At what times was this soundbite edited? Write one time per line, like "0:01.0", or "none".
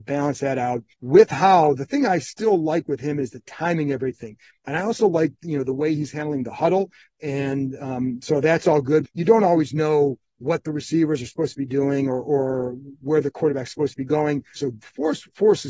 0:00.9
0:09.0
0:14.6